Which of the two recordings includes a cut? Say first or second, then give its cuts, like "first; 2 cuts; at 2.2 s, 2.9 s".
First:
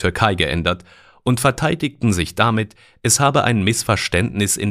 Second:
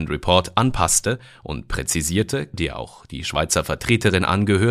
second; 1 cut; at 2.5 s